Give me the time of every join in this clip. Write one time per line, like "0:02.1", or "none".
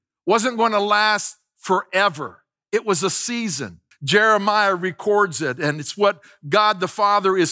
0:03.9